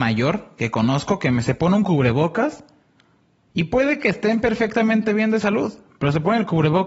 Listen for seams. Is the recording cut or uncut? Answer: uncut